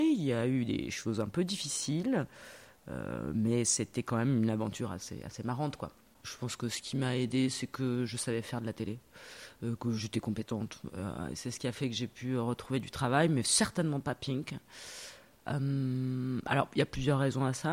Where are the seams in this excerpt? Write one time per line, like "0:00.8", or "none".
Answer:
none